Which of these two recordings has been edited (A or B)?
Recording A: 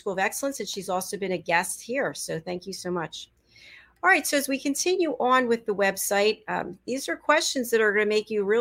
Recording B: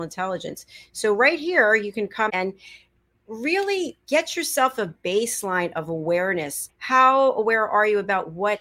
B